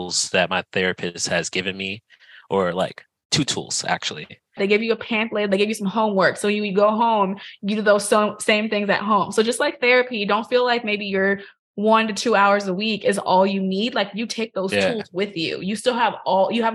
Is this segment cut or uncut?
cut